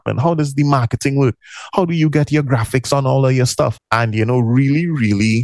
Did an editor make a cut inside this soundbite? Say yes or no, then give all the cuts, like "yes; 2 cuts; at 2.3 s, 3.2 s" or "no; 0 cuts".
yes; 1 cut; at 3.7 s